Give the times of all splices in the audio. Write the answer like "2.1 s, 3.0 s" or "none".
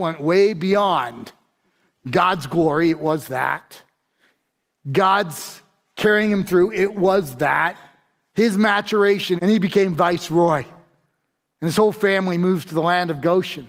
9.4 s